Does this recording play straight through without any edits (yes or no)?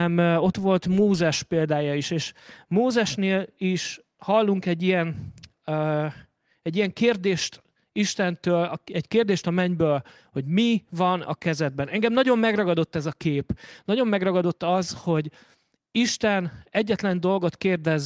yes